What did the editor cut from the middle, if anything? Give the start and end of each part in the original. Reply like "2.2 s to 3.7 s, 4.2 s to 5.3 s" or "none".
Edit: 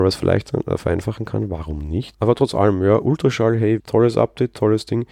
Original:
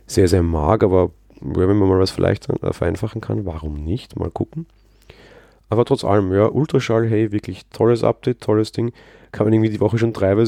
4.1 s to 5.6 s, 7.3 s to 7.7 s